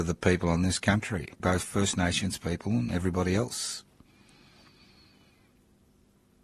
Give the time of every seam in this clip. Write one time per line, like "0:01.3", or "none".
0:01.4